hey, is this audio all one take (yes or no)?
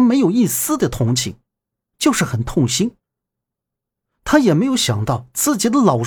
no